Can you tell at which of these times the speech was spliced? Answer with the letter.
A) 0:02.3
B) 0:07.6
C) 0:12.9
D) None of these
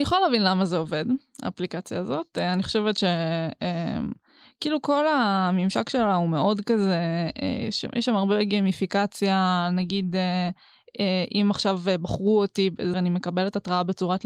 C